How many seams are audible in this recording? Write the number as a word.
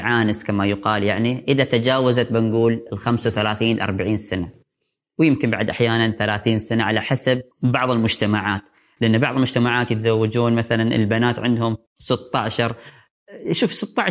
two